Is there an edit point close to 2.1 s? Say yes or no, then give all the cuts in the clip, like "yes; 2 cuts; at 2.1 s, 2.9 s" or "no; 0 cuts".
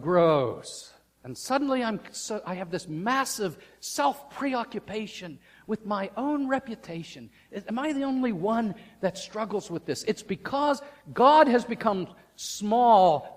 no; 0 cuts